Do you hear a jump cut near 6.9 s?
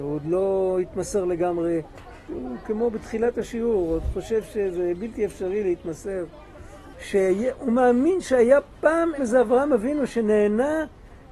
yes; 3 cuts; at 2.3 s, 6.9 s, 9.2 s

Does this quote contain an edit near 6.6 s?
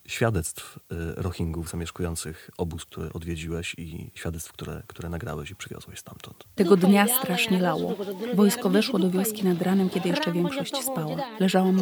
yes; 1 cut; at 6.6 s

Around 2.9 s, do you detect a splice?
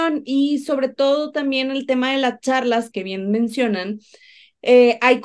yes; 1 cut; at 2.9 s

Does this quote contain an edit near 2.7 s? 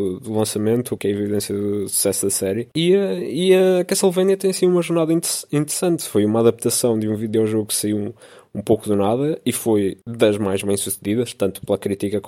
yes; 2 cuts; at 1.0 s, 2.7 s

